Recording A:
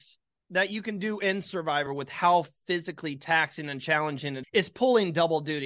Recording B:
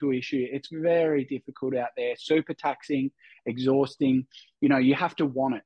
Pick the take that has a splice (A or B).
A